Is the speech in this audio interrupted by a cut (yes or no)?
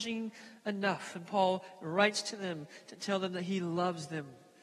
no